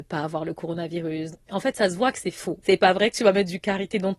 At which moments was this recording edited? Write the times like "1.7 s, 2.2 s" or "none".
1.3 s, 2.6 s